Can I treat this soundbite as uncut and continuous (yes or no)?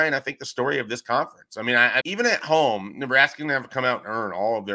no